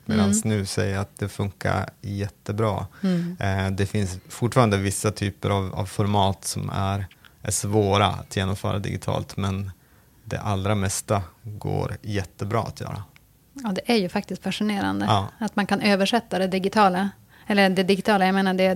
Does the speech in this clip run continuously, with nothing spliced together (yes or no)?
yes